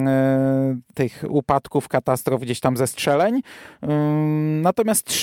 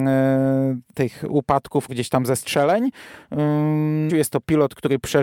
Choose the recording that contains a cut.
second; 2 cuts; at 1.9 s, 4.1 s

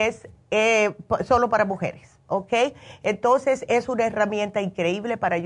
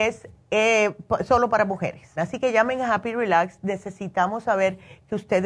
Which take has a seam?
second; 1 cut; at 2.2 s

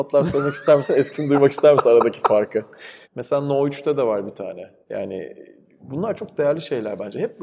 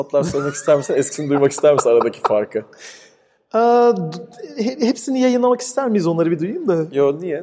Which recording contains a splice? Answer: first; 2 cuts; at 3.0 s, 4.8 s

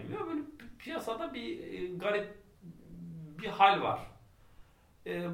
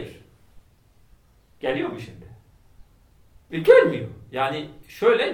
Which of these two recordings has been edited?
second; 1 cut; at 3.5 s

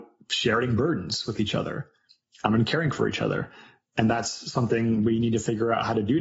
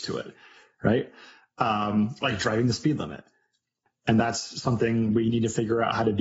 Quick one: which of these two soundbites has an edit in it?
second; 1 cut; at 3.9 s

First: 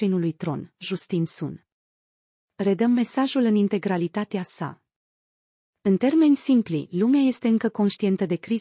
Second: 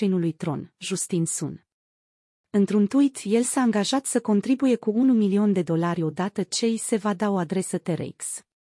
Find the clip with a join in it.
first; 2 cuts; at 2.4 s, 5.6 s

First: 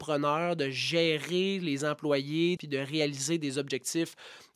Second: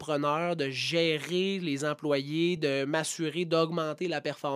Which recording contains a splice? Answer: first; 1 cut; at 2.6 s

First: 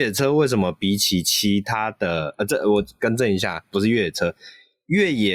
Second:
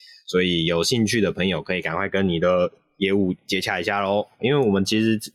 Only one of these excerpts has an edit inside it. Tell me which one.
second; 1 cut; at 4.4 s

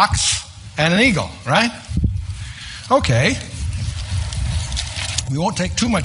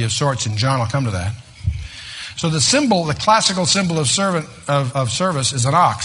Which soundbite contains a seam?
second; 1 cut; at 4.9 s

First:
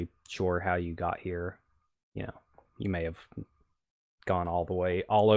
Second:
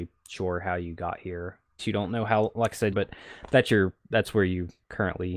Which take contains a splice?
second; 2 cuts; at 1.8 s, 2.9 s

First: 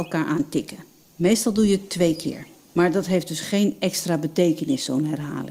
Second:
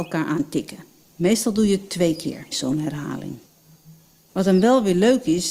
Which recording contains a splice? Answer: second; 1 cut; at 2.5 s

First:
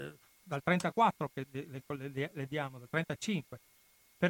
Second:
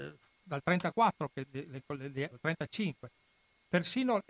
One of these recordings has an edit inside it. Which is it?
second; 1 cut; at 2.3 s

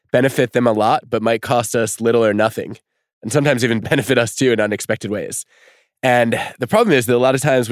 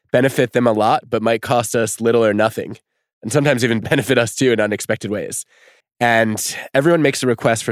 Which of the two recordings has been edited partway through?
second; 1 cut; at 5.8 s

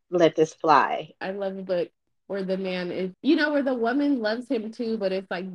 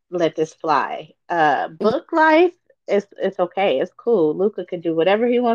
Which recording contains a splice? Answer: first; 2 cuts; at 1.2 s, 3.1 s

